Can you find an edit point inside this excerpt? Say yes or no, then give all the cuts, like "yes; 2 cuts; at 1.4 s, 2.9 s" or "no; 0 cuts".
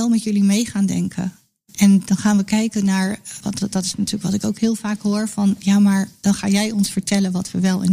no; 0 cuts